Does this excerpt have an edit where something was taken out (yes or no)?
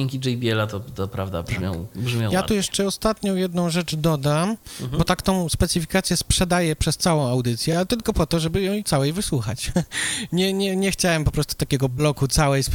no